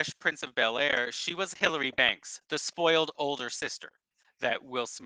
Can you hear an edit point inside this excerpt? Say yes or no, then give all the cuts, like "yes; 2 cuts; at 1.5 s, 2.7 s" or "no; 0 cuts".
no; 0 cuts